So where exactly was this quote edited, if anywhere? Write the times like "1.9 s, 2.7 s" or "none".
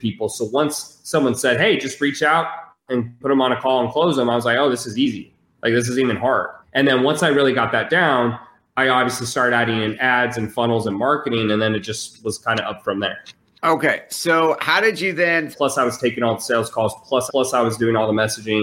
6.6 s, 15.5 s, 17.3 s